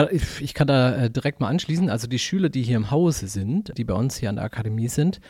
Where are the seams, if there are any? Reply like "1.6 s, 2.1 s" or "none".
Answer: 3.7 s

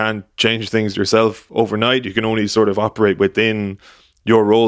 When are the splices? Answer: 2.0 s

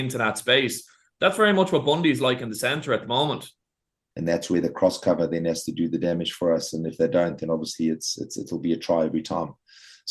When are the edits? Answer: 4.1 s

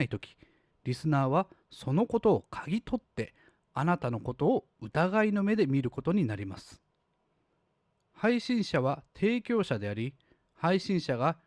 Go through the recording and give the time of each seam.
none

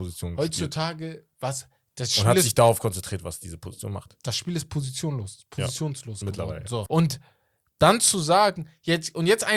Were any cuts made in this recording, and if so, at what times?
6.9 s

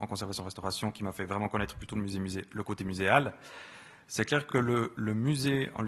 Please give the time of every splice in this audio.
none

